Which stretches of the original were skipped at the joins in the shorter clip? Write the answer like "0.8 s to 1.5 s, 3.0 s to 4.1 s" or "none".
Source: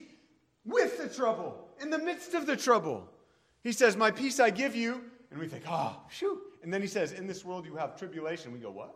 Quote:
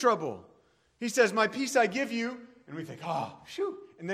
none